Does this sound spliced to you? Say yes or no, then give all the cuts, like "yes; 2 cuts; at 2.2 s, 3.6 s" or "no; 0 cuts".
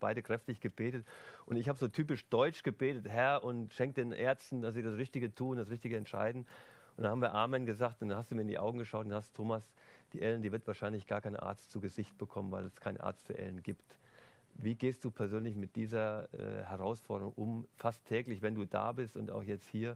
yes; 1 cut; at 17.7 s